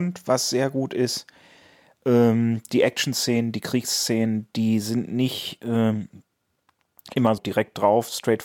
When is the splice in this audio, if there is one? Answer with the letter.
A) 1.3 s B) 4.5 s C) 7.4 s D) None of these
C